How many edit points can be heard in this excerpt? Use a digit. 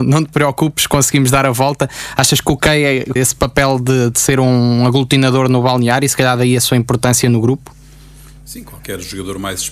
1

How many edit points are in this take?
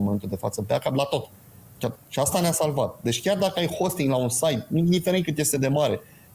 1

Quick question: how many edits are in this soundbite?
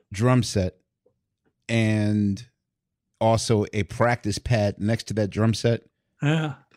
0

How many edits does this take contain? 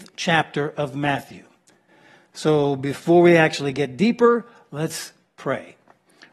0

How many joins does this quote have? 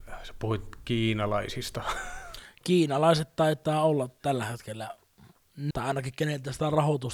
1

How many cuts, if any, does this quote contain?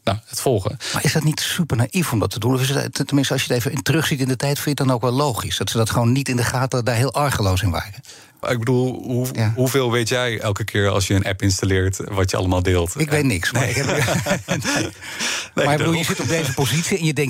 1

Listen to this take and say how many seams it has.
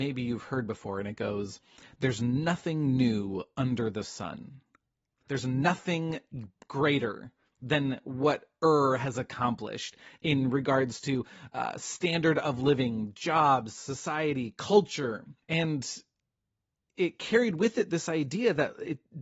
2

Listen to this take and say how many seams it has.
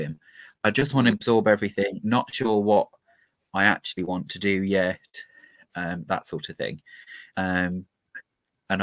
1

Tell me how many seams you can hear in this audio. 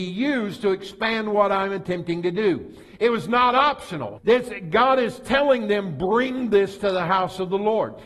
1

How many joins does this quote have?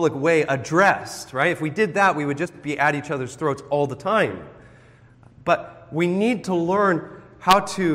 0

